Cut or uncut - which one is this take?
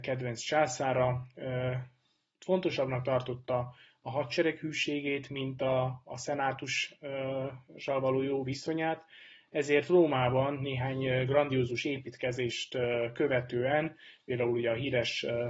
uncut